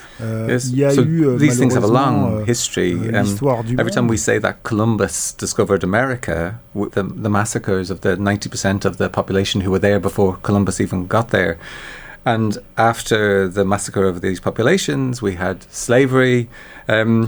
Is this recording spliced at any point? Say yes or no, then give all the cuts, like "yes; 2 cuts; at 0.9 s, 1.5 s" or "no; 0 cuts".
yes; 1 cut; at 6.9 s